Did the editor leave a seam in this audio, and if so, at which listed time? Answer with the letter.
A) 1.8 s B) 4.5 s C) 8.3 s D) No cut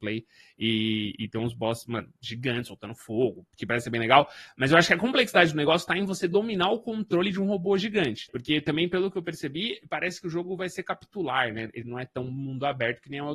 C